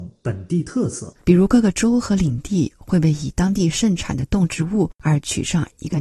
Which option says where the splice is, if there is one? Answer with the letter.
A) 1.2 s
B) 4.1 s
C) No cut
A